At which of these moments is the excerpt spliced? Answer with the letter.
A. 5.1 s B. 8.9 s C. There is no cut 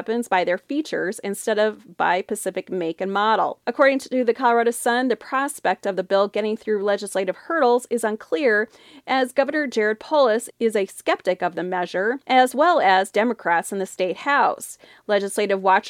C